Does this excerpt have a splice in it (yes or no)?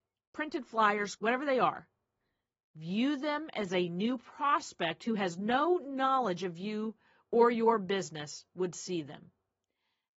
yes